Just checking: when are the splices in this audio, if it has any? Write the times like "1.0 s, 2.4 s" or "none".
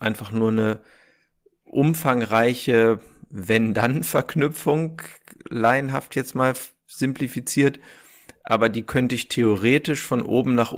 none